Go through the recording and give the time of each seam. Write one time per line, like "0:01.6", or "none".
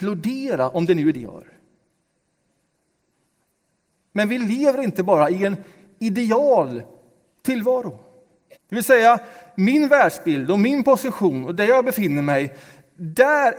0:01.1
0:08.5